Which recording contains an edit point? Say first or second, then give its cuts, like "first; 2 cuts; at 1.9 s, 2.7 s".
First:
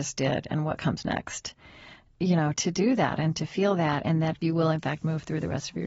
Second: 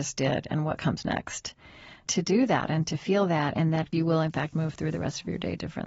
second; 1 cut; at 2.1 s